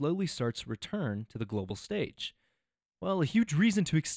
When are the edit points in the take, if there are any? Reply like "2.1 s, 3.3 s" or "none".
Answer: none